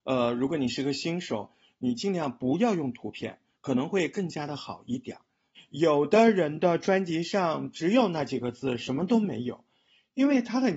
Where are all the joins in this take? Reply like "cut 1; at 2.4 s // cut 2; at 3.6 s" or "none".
cut 1; at 3.5 s // cut 2; at 5.5 s